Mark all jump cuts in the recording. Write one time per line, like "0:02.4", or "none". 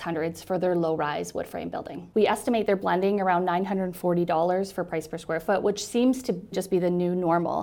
0:02.1
0:06.5